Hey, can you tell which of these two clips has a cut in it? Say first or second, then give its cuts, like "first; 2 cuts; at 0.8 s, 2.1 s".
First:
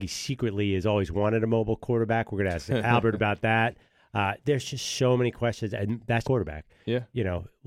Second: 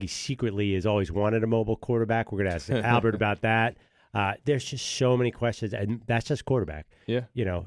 first; 1 cut; at 6.2 s